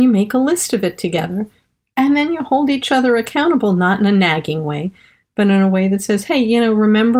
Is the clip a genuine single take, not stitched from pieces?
yes; 0 cuts

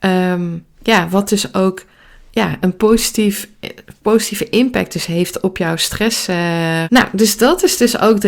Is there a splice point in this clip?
yes; 1 cut; at 6.9 s

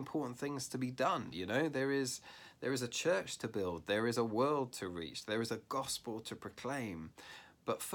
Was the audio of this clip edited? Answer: no; 0 cuts

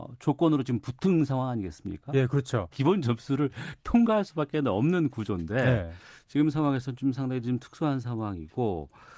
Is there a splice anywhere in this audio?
yes; 1 cut; at 2.7 s

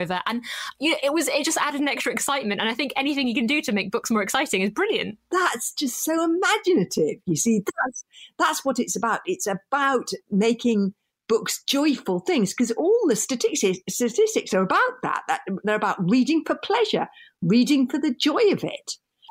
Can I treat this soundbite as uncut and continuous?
no; 1 cut; at 5.2 s

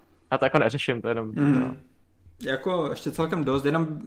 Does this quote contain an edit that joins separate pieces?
yes; 1 cut; at 2.3 s

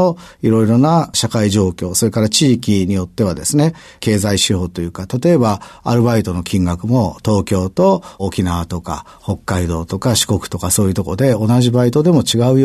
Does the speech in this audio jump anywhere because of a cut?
no; 0 cuts

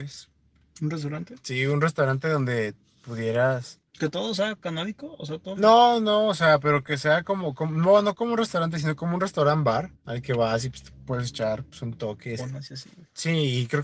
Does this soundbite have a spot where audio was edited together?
yes; 2 cuts; at 10.0 s, 12.4 s

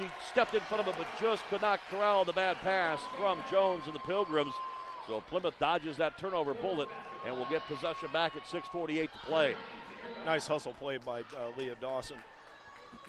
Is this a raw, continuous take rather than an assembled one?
yes; 0 cuts

